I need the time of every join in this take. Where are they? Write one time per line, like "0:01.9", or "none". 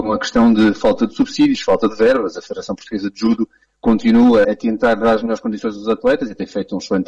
0:04.4